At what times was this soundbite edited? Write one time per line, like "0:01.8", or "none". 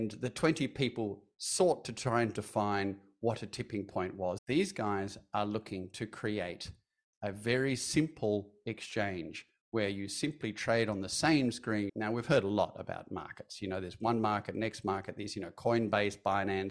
0:04.4
0:11.9